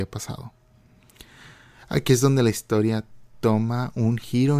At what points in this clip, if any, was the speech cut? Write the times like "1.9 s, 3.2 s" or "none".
none